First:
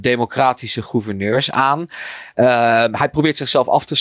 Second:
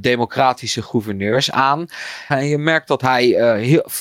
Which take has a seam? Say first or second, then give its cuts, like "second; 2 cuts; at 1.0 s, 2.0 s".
second; 1 cut; at 2.3 s